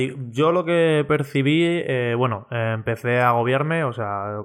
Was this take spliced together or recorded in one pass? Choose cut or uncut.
uncut